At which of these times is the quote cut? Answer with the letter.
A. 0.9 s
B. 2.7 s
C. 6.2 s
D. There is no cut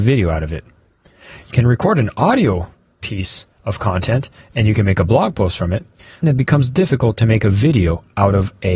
C